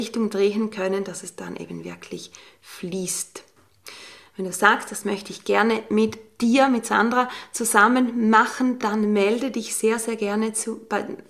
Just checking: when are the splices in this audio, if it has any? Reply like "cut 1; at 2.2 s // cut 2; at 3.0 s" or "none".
none